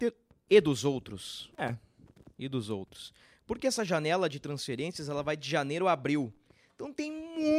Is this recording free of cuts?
yes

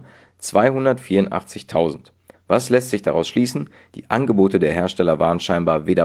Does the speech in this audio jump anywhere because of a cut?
yes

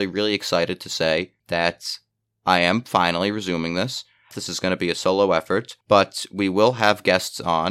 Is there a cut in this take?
yes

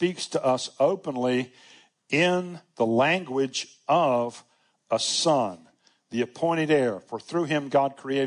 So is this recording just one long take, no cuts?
yes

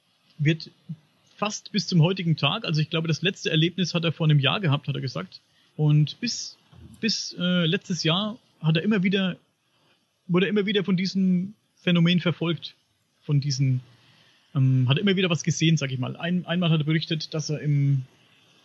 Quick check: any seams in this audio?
yes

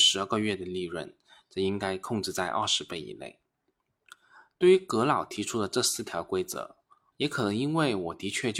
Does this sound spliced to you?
yes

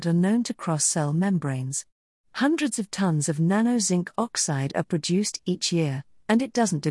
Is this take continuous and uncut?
yes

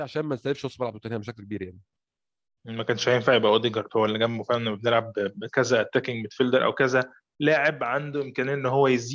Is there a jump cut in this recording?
no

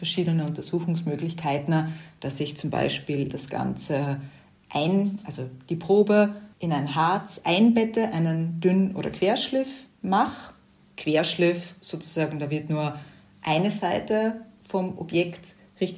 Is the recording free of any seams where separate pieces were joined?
no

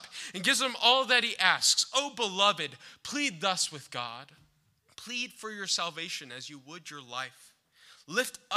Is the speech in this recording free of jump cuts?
no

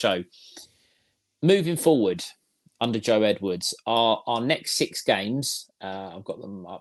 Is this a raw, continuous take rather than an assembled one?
yes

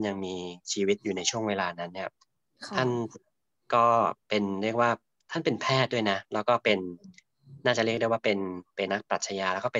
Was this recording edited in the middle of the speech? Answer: yes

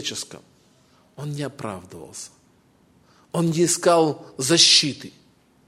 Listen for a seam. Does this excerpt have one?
no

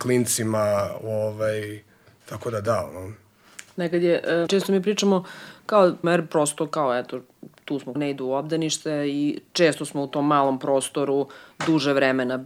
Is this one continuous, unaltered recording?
no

